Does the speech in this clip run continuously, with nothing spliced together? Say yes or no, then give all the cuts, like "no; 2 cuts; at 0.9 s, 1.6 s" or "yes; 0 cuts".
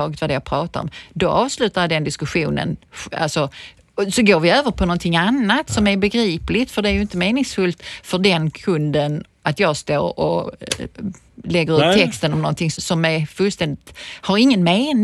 no; 1 cut; at 12.7 s